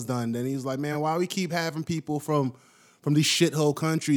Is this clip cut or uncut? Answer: uncut